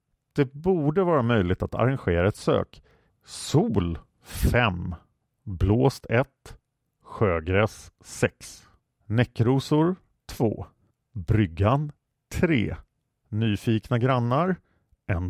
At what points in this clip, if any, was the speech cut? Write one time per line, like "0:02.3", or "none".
0:03.1